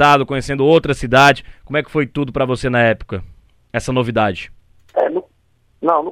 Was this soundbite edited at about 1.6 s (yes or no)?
no